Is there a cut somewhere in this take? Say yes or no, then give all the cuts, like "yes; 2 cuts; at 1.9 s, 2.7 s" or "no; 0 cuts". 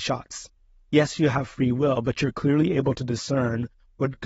no; 0 cuts